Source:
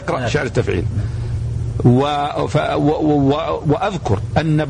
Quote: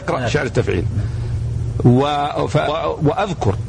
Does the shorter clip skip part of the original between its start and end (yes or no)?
yes